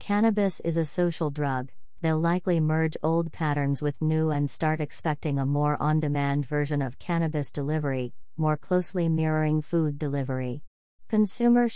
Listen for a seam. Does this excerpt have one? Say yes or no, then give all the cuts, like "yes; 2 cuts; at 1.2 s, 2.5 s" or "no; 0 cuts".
yes; 1 cut; at 2.0 s